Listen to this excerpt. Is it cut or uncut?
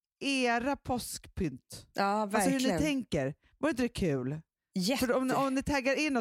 uncut